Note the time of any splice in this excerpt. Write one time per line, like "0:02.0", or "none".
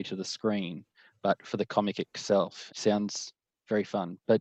0:02.7